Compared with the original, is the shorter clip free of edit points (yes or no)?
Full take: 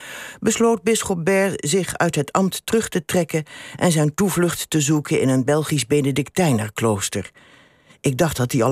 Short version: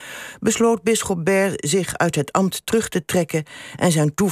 yes